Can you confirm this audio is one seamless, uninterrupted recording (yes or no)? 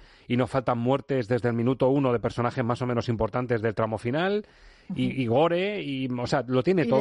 yes